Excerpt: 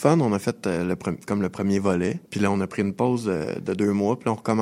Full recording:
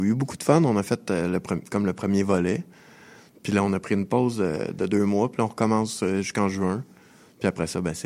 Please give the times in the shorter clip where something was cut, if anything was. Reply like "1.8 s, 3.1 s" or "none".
2.2 s